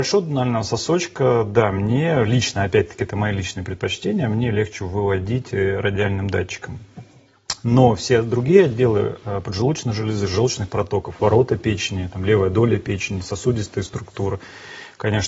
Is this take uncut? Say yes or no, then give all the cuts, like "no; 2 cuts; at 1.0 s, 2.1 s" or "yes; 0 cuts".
yes; 0 cuts